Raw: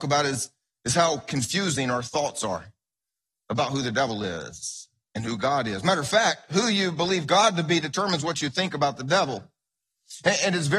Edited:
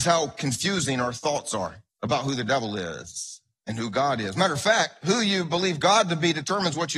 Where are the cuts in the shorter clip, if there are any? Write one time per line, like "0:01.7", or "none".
0:01.9